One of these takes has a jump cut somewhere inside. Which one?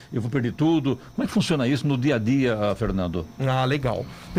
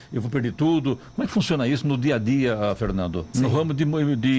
second; 1 cut; at 3.3 s

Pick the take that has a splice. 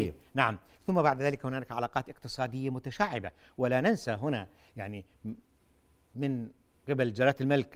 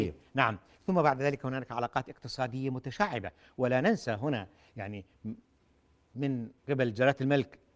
second; 1 cut; at 6.6 s

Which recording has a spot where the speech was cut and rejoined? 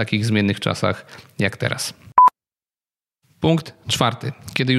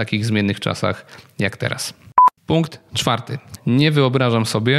second; 2 cuts; at 2.4 s, 3.6 s

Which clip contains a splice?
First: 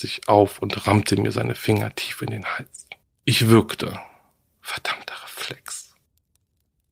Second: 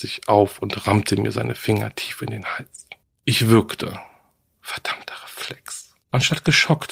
second; 1 cut; at 6.0 s

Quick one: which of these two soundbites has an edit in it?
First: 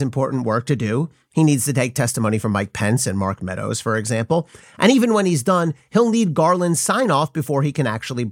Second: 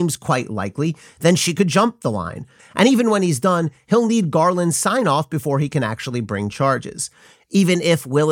second; 1 cut; at 2.6 s

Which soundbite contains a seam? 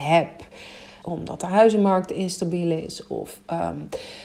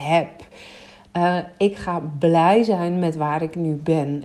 first; 1 cut; at 1.0 s

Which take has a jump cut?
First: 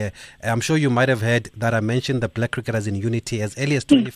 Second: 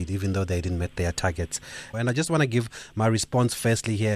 second; 1 cut; at 1.9 s

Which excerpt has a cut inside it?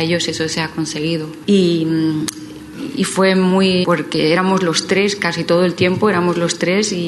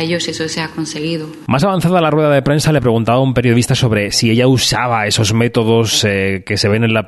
first; 2 cuts; at 1.4 s, 3.8 s

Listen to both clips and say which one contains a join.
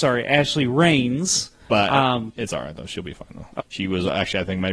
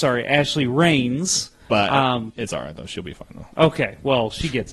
first; 1 cut; at 3.6 s

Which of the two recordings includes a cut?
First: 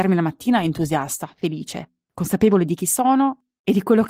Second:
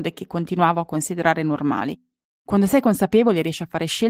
second; 1 cut; at 2.3 s

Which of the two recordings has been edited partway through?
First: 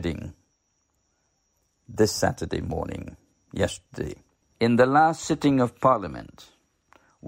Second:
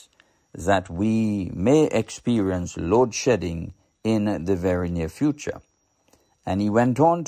first; 1 cut; at 4.4 s

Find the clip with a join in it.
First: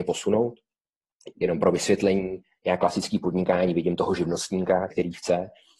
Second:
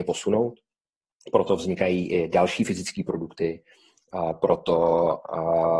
first; 2 cuts; at 1.3 s, 4.9 s

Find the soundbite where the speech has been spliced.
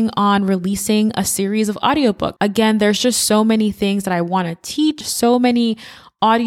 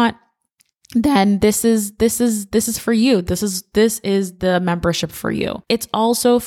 first; 2 cuts; at 2.4 s, 5.0 s

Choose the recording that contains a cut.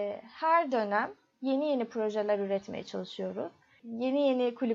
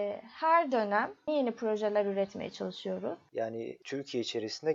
second; 2 cuts; at 1.3 s, 3.3 s

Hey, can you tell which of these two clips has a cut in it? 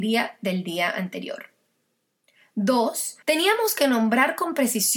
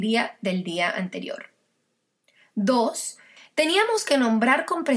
first; 1 cut; at 3.2 s

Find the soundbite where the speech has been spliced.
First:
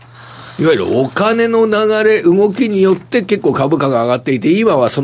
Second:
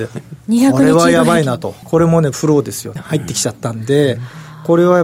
second; 2 cuts; at 1.8 s, 3.0 s

